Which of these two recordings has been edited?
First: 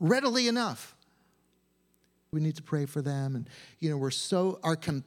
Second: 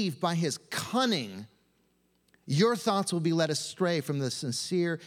first; 1 cut; at 2.3 s

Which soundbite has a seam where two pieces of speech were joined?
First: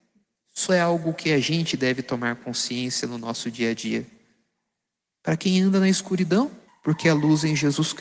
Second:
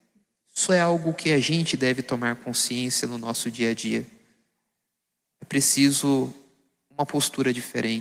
first; 2 cuts; at 5.1 s, 6.7 s

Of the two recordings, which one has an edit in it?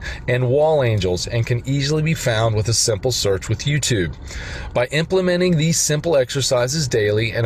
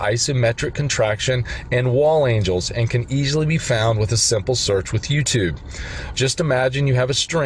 second; 1 cut; at 6.1 s

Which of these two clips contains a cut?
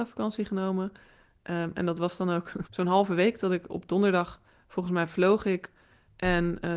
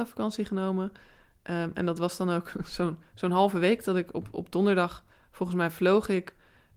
first; 2 cuts; at 2.6 s, 3.7 s

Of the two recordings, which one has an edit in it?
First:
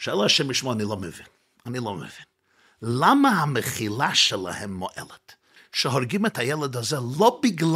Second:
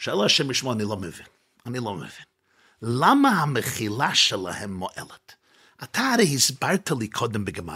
first; 1 cut; at 5.6 s

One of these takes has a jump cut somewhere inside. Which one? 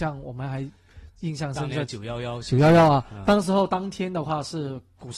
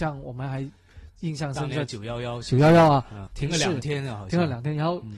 second; 1 cut; at 3.3 s

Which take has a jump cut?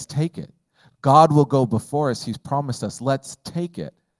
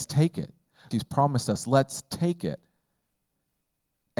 second; 1 cut; at 0.9 s

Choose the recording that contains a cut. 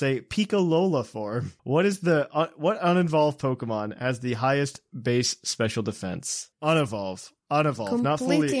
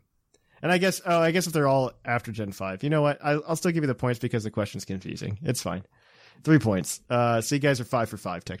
first; 2 cuts; at 1.6 s, 6.5 s

